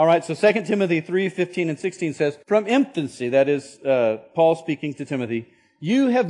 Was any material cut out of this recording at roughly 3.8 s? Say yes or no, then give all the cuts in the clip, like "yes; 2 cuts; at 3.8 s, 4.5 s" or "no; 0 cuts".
no; 1 cut; at 2.4 s